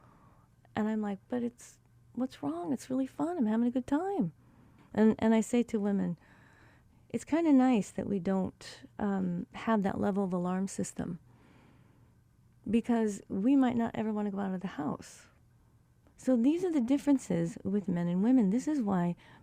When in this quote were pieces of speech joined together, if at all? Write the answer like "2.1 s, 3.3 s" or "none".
4.8 s, 16.0 s